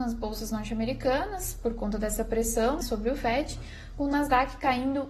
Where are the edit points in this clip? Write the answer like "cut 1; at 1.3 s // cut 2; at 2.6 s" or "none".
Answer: cut 1; at 2.8 s